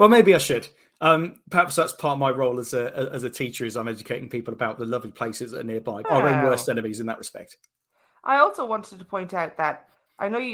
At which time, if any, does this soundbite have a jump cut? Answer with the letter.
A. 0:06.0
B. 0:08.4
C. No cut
A